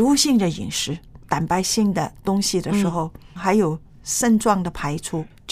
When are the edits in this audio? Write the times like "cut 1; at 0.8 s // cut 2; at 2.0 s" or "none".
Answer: cut 1; at 1.2 s // cut 2; at 3.4 s